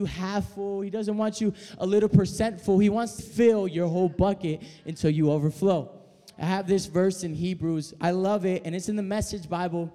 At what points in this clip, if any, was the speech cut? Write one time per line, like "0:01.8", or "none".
0:03.2